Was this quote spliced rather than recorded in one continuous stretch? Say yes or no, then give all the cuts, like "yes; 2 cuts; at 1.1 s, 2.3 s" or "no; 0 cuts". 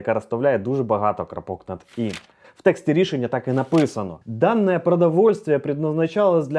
yes; 2 cuts; at 2.4 s, 4.2 s